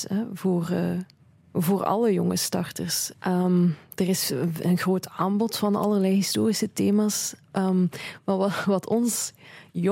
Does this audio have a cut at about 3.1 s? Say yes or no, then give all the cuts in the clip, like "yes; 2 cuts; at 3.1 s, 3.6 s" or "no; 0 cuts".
yes; 1 cut; at 3.1 s